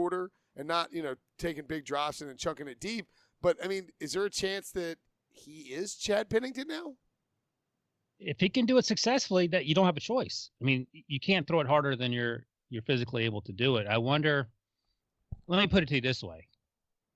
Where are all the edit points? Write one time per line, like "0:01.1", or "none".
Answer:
0:10.9